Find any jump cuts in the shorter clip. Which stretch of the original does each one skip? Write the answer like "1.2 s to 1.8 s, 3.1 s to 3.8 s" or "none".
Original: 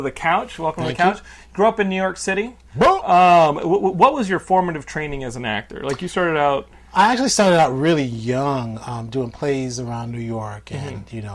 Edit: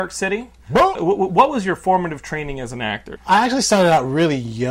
3.0 s to 3.6 s, 5.8 s to 6.8 s